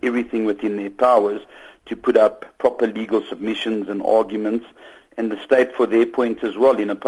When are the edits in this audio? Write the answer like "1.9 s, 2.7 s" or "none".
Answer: none